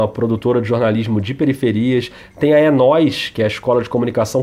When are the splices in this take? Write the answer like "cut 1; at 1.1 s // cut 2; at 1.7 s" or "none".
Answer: none